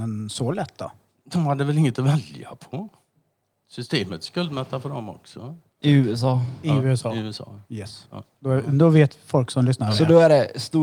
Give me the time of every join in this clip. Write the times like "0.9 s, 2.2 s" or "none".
5.8 s